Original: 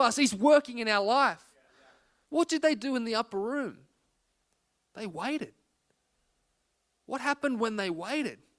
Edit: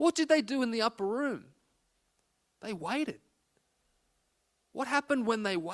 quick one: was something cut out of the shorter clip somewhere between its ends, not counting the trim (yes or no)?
no